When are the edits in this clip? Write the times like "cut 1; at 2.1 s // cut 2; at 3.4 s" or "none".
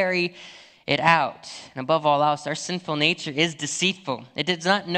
none